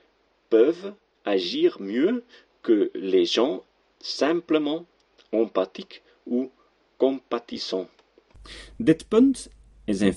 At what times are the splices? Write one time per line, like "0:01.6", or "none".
none